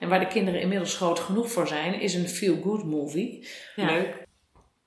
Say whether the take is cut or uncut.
cut